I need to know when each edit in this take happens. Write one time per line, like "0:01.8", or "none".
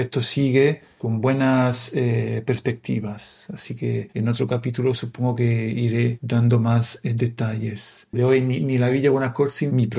0:08.1

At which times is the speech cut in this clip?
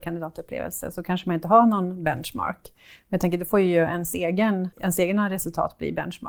0:04.7

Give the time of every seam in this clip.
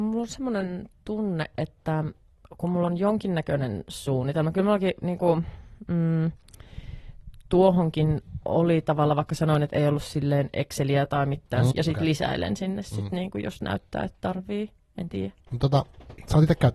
0:11.7
0:15.5

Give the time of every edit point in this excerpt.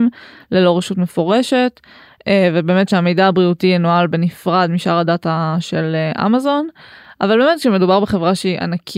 none

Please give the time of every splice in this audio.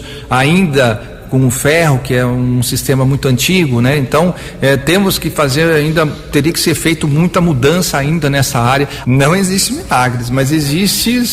0:09.0

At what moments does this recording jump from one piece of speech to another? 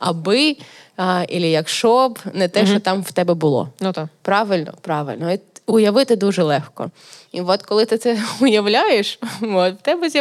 none

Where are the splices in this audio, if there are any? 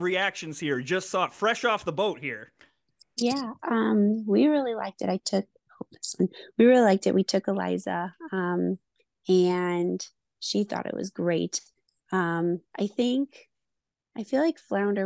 none

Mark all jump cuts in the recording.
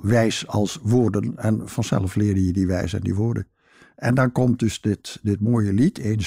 none

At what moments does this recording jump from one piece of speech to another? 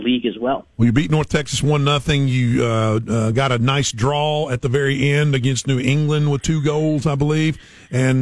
none

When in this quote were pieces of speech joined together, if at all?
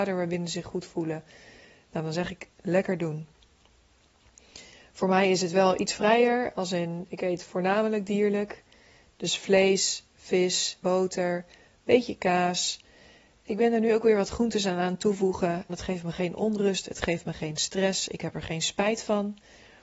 0:10.8
0:15.7

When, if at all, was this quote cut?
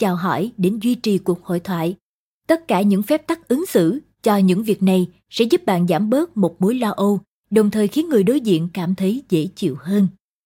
none

